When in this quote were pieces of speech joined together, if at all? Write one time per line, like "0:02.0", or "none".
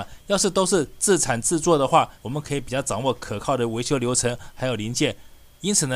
0:02.2